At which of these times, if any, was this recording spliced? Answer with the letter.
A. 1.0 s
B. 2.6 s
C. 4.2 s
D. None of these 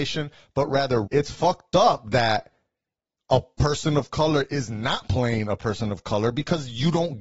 A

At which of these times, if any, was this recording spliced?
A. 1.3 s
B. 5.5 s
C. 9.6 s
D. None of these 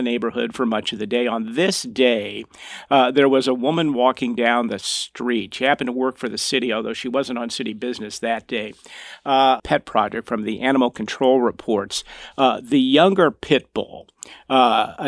C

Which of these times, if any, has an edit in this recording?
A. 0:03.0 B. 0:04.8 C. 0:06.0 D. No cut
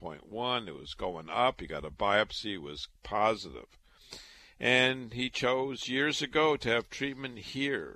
A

